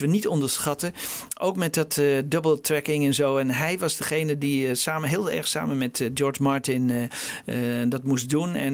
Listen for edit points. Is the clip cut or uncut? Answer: uncut